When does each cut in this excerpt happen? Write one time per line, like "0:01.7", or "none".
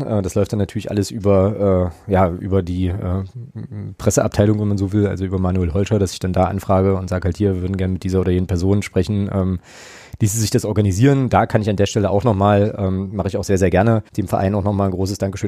0:14.1